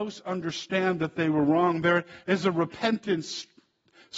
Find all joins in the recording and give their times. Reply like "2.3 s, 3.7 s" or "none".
none